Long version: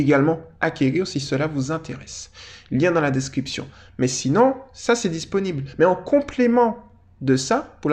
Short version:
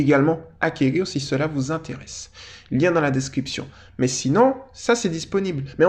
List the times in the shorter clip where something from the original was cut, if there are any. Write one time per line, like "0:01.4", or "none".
none

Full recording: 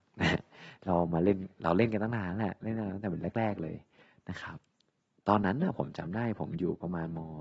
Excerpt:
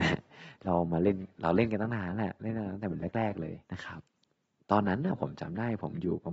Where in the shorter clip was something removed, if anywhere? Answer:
0:03.6

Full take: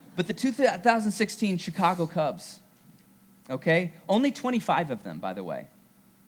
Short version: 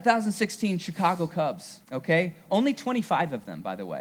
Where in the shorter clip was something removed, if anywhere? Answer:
0:01.8

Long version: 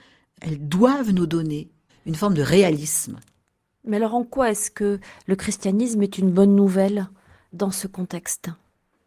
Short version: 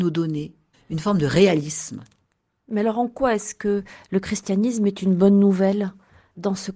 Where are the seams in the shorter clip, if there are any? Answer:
none

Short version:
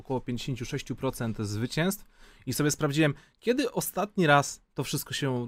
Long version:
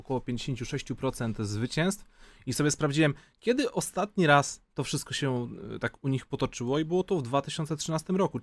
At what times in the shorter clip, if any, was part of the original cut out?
none

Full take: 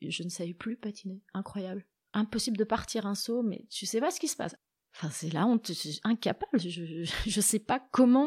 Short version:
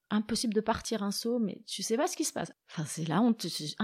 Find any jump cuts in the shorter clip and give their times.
0:02.6

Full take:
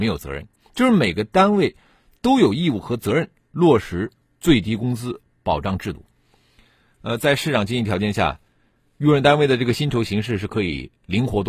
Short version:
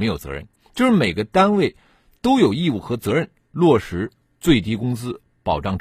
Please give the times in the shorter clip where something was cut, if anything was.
none

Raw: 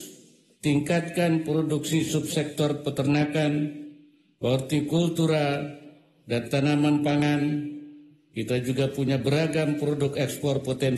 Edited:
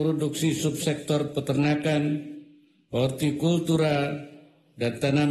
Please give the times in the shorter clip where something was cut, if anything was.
none

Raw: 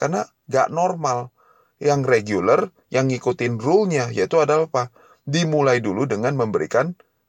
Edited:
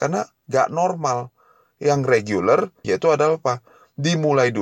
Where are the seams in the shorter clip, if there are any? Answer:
0:02.8

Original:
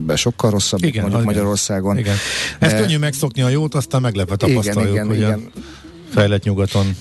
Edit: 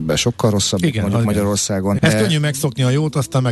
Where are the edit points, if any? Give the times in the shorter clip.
0:02.0

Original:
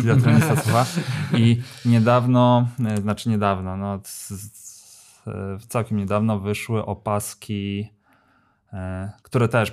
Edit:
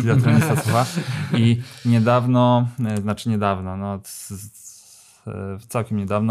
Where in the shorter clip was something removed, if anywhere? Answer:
none

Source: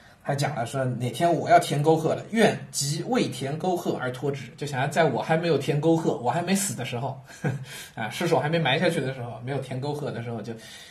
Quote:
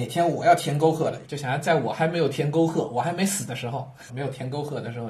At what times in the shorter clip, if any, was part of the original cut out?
0:01.2
0:04.1

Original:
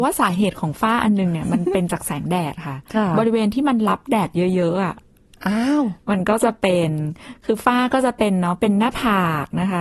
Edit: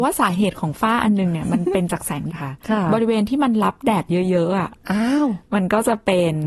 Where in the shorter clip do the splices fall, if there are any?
0:02.3
0:04.8

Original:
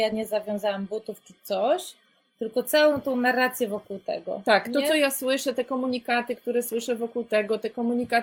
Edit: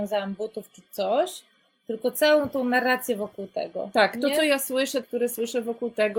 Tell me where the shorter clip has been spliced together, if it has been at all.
0:05.0

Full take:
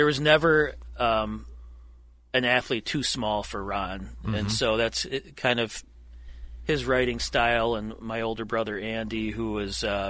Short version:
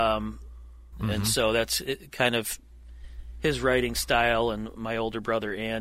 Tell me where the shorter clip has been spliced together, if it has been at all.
0:00.9

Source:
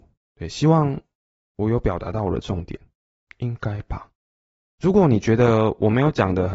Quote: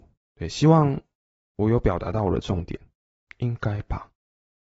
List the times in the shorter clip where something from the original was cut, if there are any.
none

